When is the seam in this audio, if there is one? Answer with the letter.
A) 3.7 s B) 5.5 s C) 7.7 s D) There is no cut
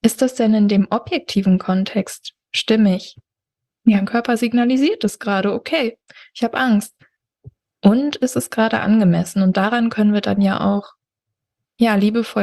A